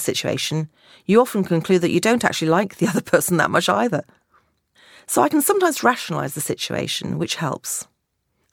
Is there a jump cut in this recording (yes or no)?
no